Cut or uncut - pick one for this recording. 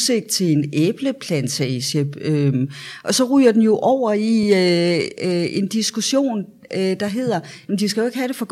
uncut